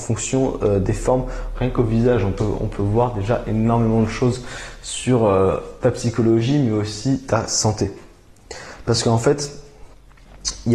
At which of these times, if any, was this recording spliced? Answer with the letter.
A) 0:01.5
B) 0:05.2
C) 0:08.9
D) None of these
A